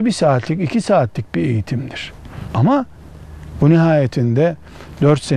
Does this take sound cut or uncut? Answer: cut